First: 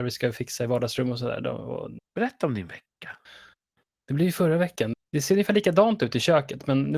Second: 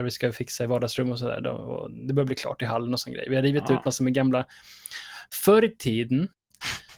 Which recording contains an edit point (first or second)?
first